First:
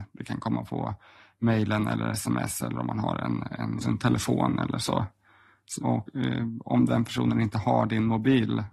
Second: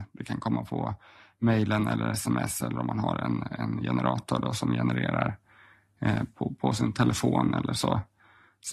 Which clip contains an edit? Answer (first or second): first